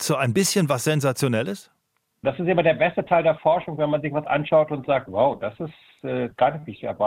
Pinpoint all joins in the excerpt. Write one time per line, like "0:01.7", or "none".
0:02.2